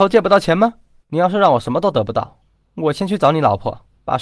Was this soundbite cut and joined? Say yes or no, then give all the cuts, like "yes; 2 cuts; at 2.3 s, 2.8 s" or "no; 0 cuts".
yes; 1 cut; at 1.0 s